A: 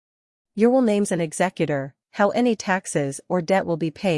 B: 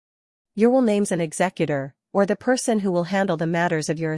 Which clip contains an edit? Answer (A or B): A